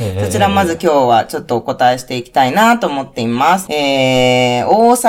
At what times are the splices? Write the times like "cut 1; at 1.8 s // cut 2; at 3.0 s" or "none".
cut 1; at 3.7 s